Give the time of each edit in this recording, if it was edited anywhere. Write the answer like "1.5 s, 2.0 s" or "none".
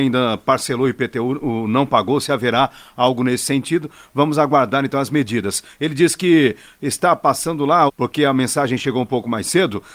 5.7 s, 7.9 s